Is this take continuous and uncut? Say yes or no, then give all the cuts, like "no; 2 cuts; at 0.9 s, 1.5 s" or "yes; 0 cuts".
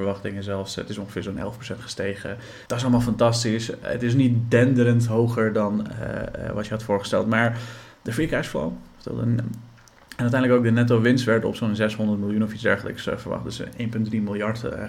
no; 1 cut; at 2.7 s